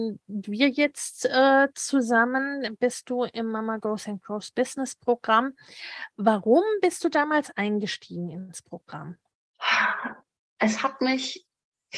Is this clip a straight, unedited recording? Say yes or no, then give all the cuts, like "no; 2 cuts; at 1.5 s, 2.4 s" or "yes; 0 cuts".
yes; 0 cuts